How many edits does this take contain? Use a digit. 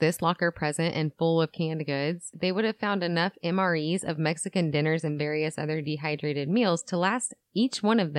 1